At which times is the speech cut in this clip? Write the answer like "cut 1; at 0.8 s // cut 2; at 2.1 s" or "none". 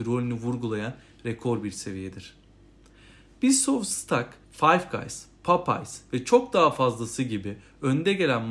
cut 1; at 4.4 s